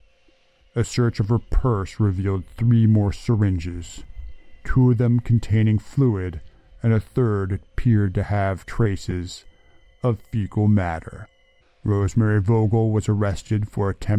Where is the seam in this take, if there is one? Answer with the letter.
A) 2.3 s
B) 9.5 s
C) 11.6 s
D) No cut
C